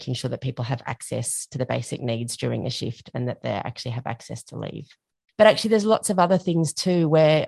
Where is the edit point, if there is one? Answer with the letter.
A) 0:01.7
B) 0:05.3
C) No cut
B